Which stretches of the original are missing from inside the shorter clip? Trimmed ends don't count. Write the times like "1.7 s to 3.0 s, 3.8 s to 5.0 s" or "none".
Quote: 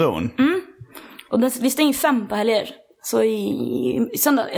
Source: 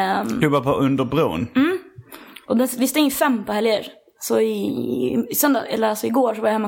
none